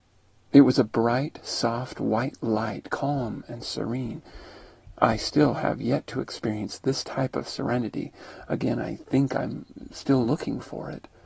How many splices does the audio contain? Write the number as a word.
zero